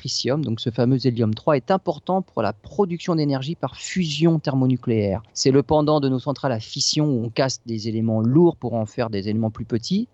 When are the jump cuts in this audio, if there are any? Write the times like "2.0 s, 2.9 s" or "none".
5.3 s